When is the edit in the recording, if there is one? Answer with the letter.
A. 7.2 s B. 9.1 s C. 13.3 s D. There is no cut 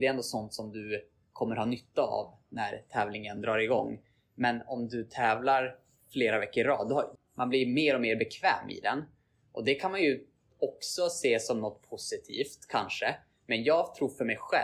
A